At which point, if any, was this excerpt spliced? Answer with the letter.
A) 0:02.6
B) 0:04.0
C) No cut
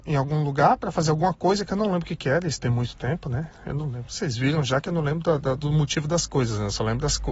C